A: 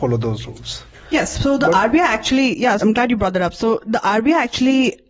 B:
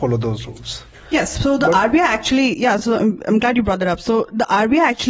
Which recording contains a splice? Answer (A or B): A